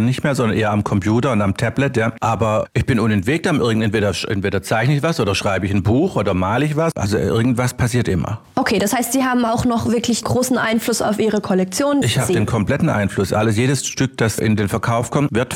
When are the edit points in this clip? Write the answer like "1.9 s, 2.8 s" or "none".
12.0 s